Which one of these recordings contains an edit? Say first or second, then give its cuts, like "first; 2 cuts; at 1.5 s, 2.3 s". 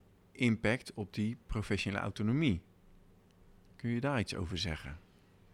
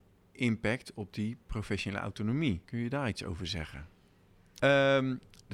second; 2 cuts; at 2.6 s, 4.6 s